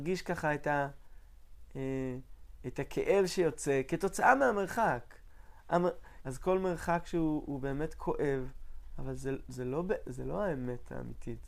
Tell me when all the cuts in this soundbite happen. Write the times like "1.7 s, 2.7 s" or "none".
6.2 s